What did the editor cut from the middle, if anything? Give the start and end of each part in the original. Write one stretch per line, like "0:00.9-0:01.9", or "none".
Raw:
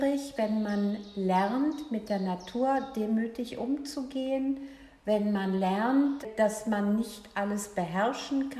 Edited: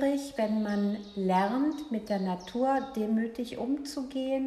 none